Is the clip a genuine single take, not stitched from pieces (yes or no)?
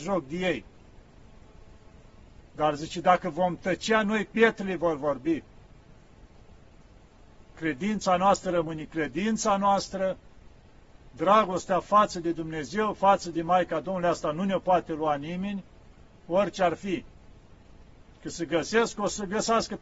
no